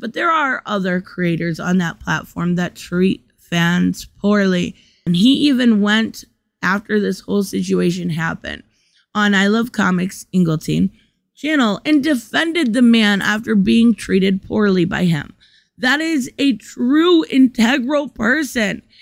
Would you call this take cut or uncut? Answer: cut